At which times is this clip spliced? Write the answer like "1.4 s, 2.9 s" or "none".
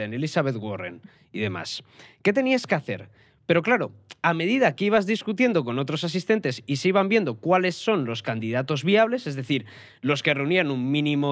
3.4 s